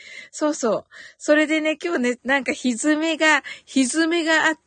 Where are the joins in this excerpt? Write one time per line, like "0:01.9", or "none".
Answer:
0:02.2